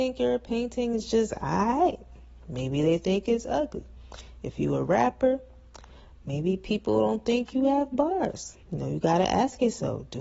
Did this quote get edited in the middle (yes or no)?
yes